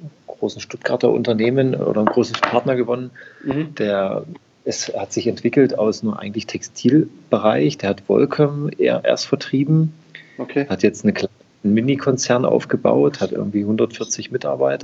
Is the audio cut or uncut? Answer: uncut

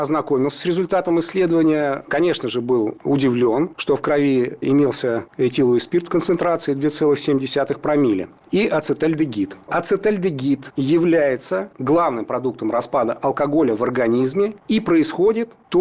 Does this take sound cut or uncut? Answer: uncut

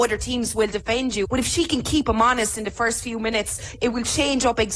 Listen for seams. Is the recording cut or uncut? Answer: cut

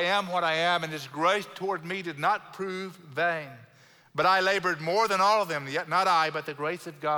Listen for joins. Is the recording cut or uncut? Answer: uncut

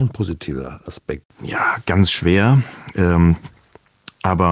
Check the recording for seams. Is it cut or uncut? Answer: cut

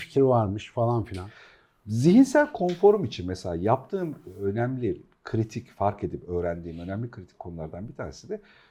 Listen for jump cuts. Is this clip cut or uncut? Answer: uncut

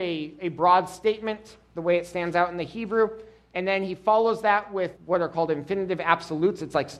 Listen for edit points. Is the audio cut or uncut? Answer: cut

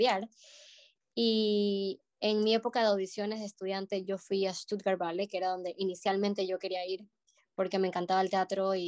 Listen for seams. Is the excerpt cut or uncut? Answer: uncut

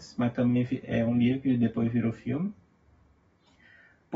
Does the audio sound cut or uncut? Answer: uncut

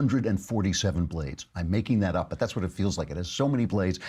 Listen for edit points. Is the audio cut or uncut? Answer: uncut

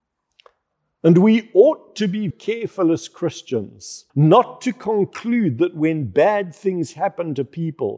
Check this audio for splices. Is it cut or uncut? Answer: cut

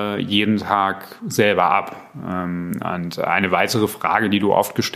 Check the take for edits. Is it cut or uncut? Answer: uncut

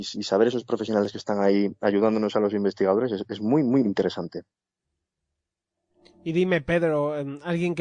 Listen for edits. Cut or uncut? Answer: cut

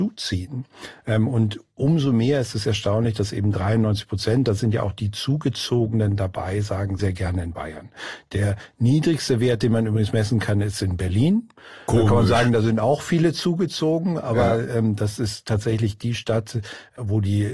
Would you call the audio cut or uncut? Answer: cut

